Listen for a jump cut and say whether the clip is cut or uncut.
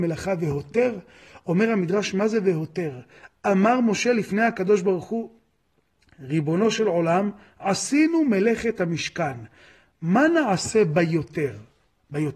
uncut